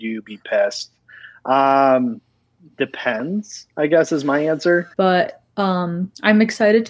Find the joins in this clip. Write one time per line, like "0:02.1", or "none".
0:04.9